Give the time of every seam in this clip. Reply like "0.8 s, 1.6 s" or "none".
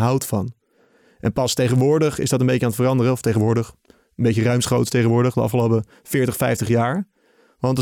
3.8 s